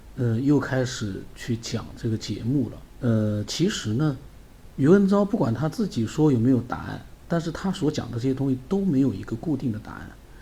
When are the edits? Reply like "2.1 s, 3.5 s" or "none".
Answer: 2.9 s, 4.7 s